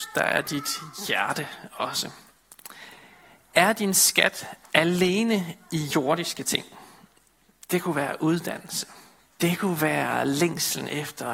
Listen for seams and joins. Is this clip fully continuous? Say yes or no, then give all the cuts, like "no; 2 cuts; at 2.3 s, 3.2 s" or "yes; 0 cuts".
no; 1 cut; at 9.3 s